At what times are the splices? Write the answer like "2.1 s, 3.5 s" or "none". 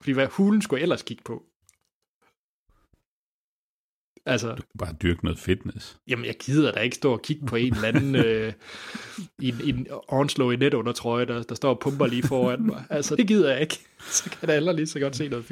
13.2 s